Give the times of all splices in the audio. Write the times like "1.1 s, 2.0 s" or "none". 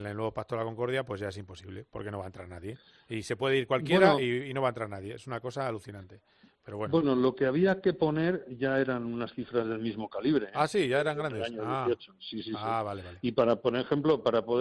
none